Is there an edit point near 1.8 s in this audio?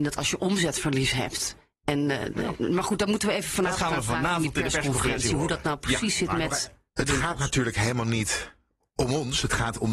no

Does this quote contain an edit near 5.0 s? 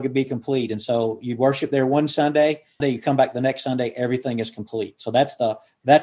no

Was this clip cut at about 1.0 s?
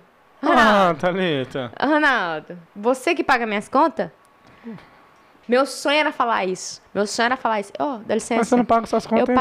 no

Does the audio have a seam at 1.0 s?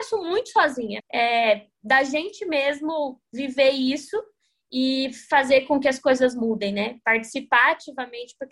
yes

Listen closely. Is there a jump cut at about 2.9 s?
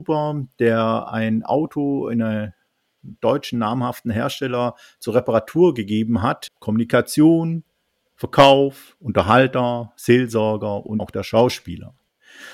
no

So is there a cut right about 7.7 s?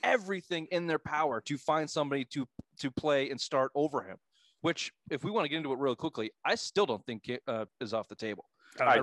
yes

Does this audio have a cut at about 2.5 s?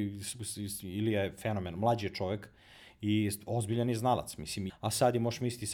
no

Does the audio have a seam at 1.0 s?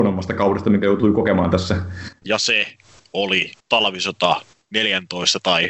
no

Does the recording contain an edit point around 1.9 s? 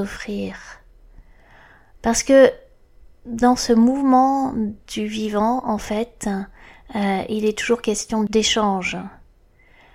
yes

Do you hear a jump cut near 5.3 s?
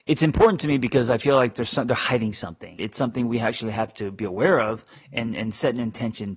no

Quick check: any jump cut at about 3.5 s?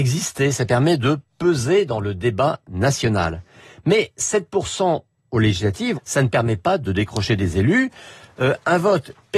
no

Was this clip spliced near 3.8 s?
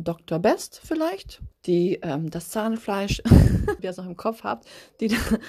yes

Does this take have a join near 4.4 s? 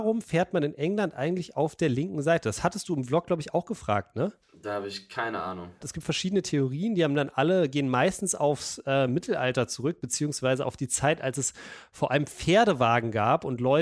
yes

